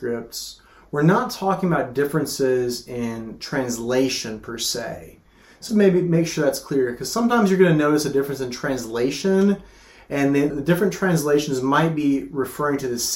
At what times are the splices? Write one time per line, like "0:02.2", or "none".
0:05.7
0:10.5

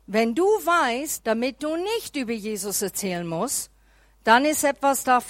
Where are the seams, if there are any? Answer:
0:01.2

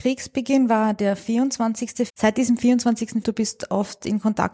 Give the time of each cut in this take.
0:02.1
0:03.2

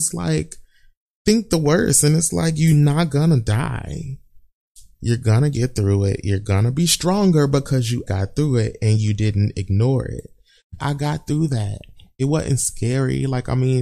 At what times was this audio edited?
0:08.1
0:10.8

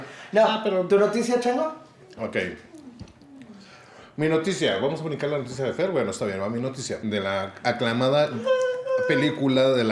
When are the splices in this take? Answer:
0:07.0

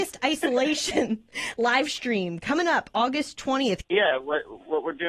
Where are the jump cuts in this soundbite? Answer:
0:03.8

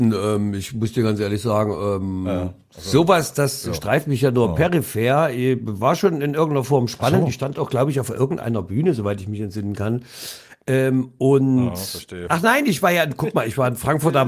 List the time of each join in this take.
0:12.3

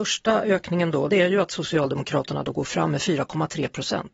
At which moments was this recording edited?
0:01.1

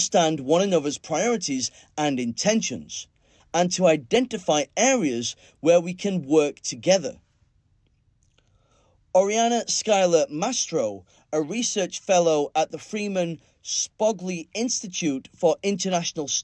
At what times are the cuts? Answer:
0:03.4

